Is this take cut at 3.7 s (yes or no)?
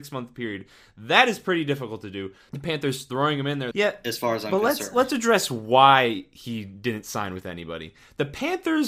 yes